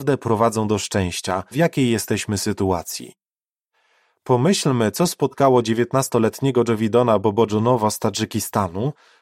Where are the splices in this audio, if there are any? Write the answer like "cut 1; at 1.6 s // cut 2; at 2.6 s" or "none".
cut 1; at 1.5 s